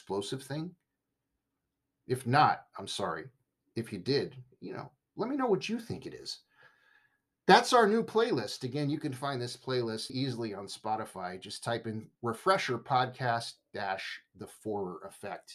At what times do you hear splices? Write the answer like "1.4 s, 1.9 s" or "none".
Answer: 10.1 s